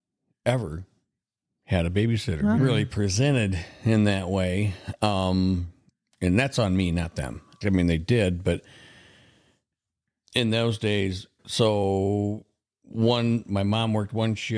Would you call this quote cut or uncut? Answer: cut